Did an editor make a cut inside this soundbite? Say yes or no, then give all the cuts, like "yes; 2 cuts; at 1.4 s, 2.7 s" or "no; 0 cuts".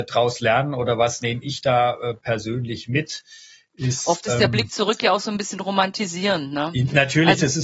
no; 0 cuts